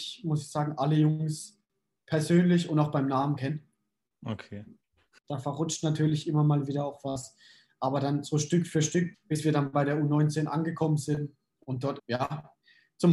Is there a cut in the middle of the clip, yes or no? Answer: yes